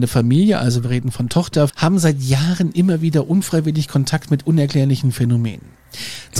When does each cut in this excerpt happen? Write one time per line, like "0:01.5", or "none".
0:01.7